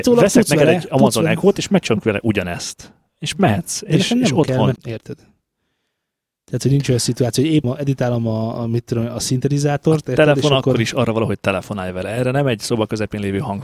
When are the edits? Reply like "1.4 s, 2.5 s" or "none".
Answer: 4.8 s, 7.6 s